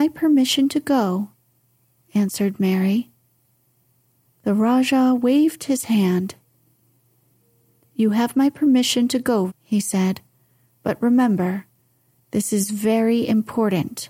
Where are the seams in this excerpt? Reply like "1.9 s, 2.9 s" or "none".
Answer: 9.5 s